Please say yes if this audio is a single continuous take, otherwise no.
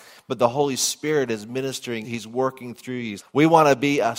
no